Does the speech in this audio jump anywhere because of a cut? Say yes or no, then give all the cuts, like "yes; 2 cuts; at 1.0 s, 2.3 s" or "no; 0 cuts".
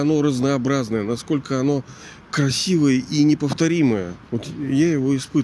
yes; 1 cut; at 4.3 s